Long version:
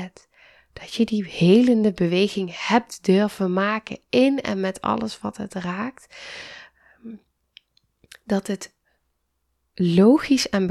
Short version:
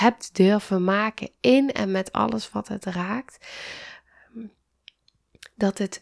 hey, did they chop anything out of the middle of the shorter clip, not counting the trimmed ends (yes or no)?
no